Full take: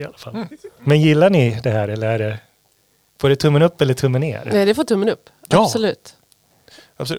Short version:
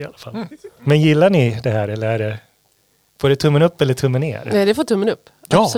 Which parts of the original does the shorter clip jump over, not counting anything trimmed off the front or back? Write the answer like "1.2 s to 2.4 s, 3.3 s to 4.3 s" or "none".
none